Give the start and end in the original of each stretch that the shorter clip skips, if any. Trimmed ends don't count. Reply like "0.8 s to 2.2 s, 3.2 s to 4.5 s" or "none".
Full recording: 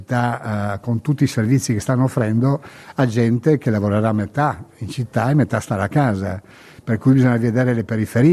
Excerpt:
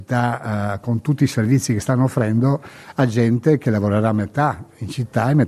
none

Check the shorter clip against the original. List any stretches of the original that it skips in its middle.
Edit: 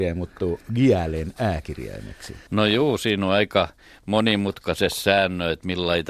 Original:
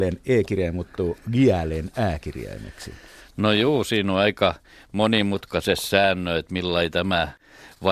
3.0 s to 3.3 s

